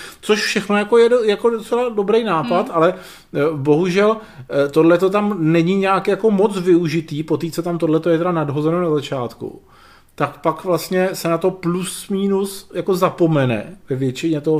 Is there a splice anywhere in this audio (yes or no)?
no